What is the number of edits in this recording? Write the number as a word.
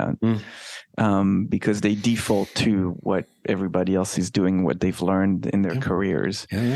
zero